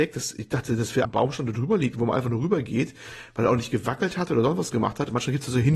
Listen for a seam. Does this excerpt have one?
yes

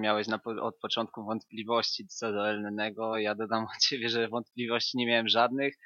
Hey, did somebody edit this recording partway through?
no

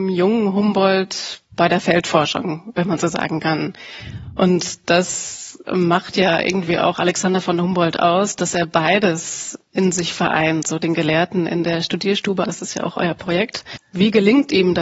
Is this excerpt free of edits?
no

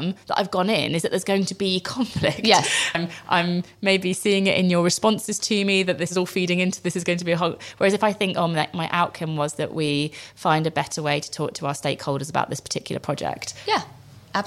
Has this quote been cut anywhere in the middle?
yes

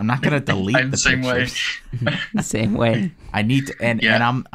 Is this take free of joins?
yes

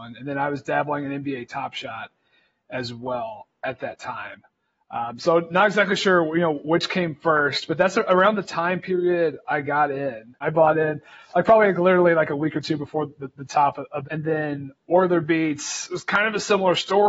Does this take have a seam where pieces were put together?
yes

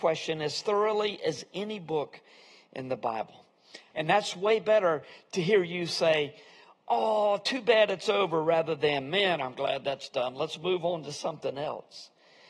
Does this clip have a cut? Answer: yes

